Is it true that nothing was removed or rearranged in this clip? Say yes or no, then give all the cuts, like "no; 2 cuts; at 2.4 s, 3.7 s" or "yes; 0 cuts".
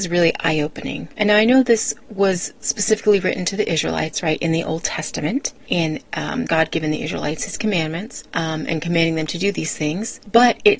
no; 1 cut; at 6.5 s